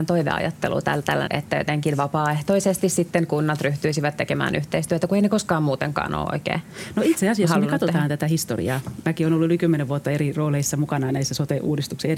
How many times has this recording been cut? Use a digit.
1